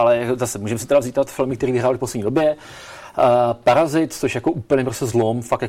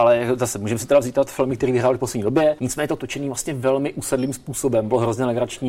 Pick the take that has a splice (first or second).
second